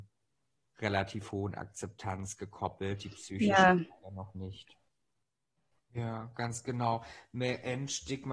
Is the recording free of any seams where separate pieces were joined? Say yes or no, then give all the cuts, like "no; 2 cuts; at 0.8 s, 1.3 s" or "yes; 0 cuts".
no; 1 cut; at 5.7 s